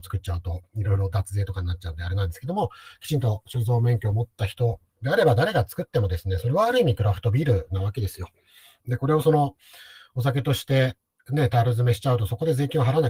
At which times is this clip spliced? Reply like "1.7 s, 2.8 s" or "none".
8.8 s